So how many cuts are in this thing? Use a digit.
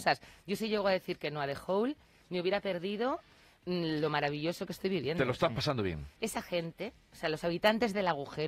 1